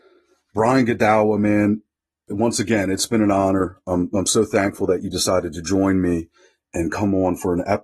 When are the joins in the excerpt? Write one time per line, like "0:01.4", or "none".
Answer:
none